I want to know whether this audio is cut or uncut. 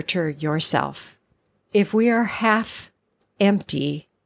cut